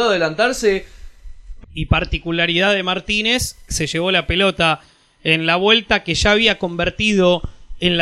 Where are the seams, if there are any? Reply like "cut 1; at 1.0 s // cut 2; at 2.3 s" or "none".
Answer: cut 1; at 1.6 s // cut 2; at 3.7 s